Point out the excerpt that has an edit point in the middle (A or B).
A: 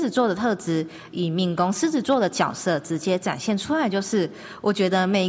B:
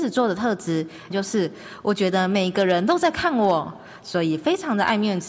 B